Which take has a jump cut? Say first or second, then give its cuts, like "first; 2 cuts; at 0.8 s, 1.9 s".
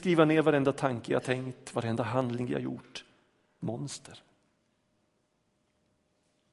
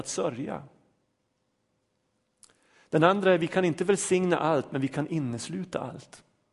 first; 1 cut; at 3.6 s